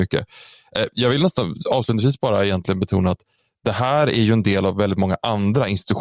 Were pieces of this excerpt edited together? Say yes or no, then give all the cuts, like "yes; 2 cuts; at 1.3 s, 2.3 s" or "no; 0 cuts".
no; 0 cuts